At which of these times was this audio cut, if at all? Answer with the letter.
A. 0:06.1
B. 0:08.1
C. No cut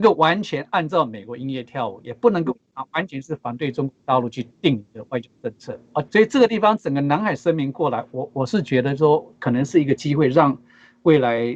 A